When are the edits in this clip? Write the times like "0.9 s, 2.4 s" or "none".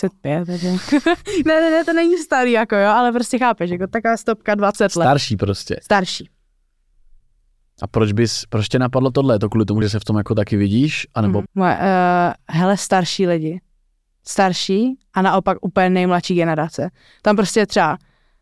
9.8 s, 11.5 s